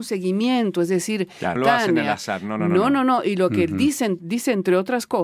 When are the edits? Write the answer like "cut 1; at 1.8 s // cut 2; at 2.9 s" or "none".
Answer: cut 1; at 1.6 s